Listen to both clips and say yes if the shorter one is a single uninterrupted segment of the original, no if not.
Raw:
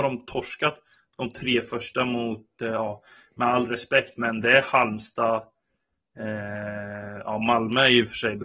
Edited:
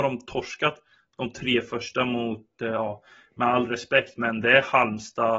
yes